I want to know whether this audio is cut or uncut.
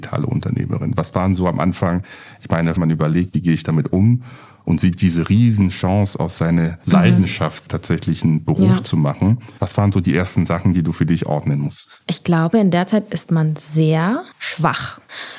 cut